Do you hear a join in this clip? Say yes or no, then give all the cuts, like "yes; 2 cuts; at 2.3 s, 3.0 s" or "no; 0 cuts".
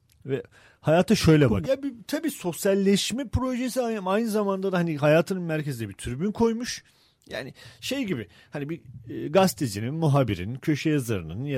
yes; 1 cut; at 1.6 s